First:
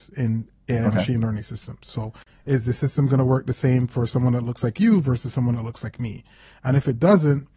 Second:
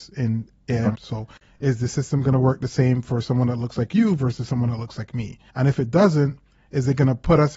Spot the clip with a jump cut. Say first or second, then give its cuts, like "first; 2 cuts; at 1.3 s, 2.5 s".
second; 2 cuts; at 0.9 s, 5.5 s